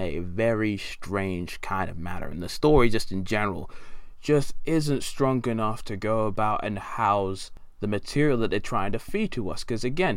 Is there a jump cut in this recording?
no; 0 cuts

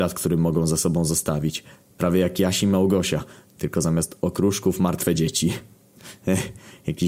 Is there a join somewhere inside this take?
no; 0 cuts

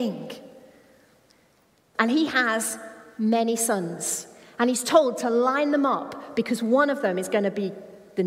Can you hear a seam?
yes; 1 cut; at 1.9 s

